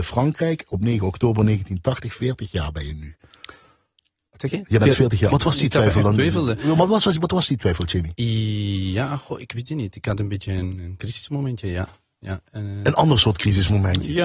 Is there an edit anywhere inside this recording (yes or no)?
yes